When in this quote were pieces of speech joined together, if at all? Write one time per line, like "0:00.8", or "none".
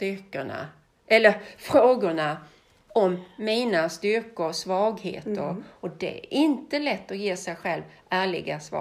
0:05.7